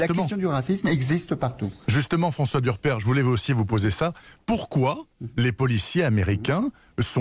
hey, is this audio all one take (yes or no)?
yes